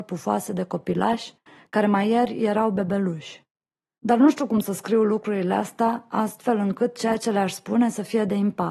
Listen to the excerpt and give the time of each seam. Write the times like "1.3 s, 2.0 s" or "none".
none